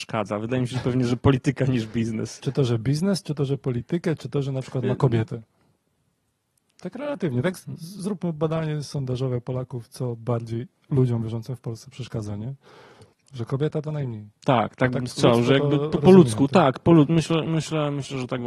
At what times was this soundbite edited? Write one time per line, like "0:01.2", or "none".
0:13.1